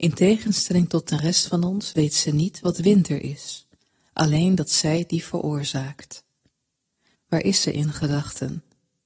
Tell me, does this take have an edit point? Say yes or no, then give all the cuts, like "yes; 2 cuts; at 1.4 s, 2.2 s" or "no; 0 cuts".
yes; 1 cut; at 7.1 s